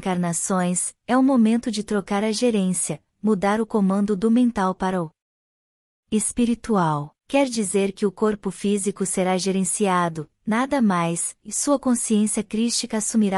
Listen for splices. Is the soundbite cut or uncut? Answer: cut